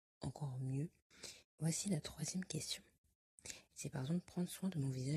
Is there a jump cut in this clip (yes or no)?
yes